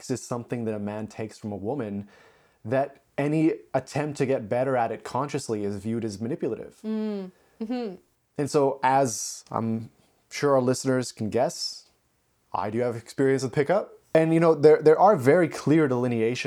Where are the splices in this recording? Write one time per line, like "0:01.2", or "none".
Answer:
0:14.0